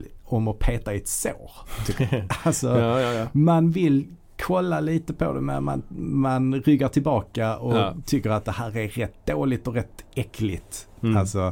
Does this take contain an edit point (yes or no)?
no